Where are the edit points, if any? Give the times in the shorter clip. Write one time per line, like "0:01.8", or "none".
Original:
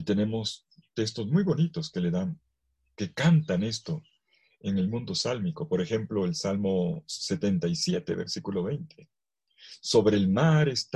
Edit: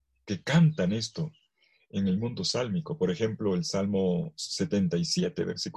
none